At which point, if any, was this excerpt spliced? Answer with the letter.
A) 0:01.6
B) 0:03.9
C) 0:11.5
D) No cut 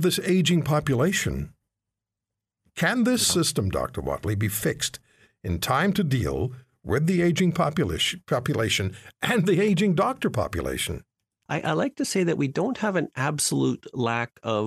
C